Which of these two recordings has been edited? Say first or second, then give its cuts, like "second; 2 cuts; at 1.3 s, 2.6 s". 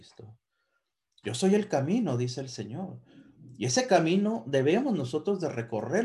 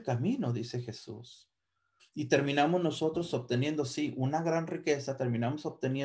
second; 1 cut; at 2.0 s